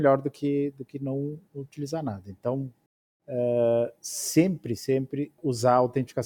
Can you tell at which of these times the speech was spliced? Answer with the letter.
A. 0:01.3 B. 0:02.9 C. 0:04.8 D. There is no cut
C